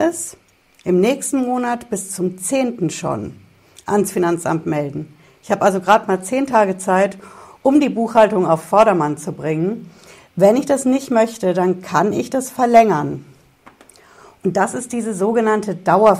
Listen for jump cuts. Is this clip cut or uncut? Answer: uncut